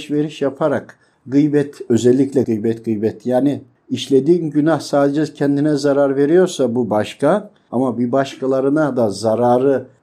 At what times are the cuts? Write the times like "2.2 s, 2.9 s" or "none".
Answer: 2.4 s